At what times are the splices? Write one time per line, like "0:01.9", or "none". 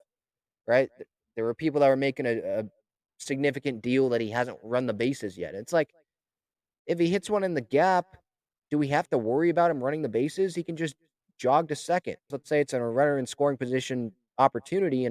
0:12.3